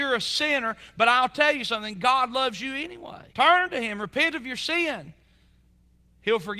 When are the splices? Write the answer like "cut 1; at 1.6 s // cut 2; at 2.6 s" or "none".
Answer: cut 1; at 3.3 s